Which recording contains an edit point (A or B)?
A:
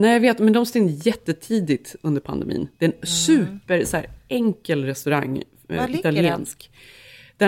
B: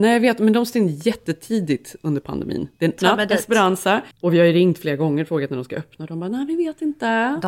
B